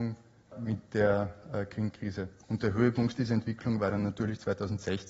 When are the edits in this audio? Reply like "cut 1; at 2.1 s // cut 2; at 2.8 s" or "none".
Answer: cut 1; at 2.4 s